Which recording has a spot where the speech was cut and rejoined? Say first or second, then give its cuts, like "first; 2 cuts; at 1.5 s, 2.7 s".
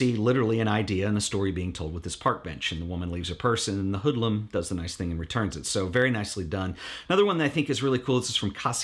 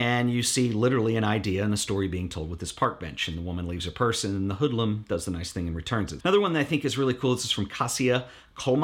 second; 1 cut; at 6.2 s